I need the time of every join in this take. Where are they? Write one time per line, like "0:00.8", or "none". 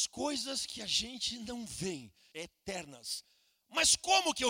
0:02.3